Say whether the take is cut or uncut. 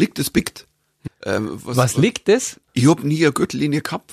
cut